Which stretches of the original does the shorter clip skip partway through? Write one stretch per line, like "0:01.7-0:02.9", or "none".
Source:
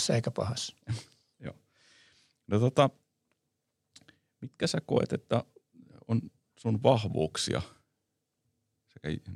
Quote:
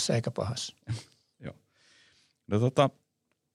none